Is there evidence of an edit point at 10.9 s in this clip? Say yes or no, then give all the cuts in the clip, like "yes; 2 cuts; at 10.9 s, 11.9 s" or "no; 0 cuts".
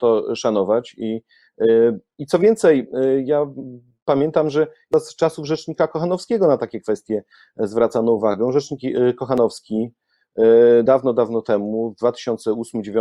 no; 0 cuts